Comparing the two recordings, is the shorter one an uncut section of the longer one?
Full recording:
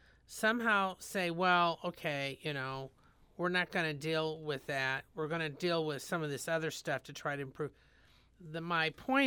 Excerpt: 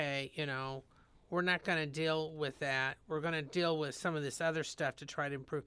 yes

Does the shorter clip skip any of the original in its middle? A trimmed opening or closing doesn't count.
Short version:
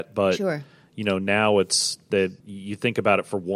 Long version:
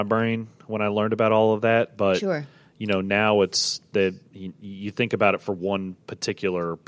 yes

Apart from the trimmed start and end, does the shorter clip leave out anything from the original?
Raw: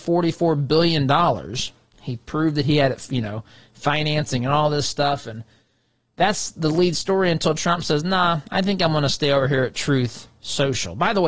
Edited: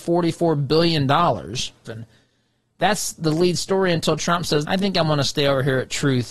yes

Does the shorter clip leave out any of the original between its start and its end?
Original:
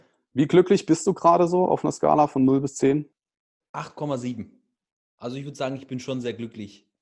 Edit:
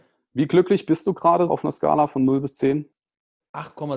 yes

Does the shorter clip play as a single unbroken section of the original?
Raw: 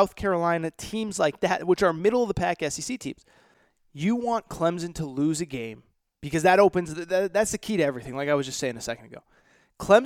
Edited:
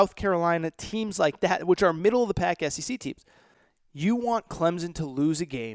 yes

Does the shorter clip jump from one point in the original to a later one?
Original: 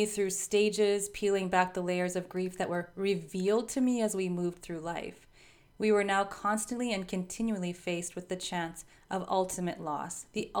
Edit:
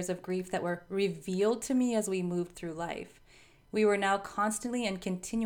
no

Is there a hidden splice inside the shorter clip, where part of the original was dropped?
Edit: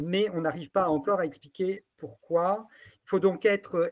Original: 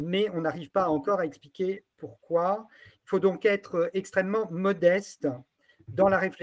no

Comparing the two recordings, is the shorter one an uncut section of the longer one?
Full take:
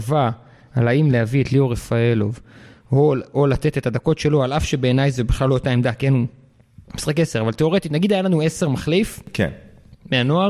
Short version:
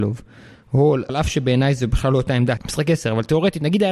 no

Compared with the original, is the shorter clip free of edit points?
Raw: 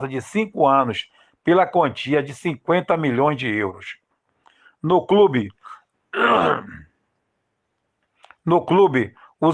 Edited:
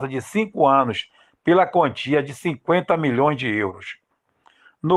yes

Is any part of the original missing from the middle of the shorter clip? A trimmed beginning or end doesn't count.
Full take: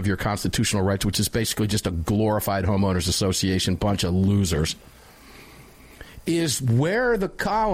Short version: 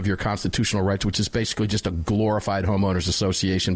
no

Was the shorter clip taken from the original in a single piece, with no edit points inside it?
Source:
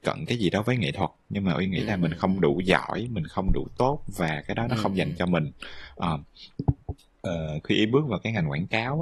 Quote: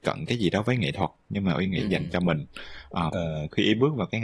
no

